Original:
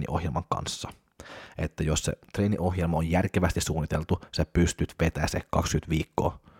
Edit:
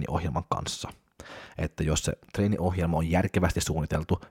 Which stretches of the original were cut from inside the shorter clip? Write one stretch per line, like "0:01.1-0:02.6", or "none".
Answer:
none